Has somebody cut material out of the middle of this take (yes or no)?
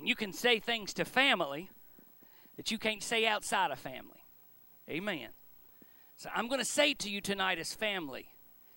no